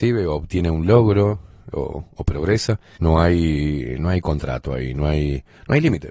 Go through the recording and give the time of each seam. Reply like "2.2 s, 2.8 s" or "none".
1.7 s, 3.0 s